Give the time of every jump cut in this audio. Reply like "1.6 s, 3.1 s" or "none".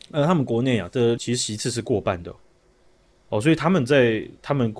1.2 s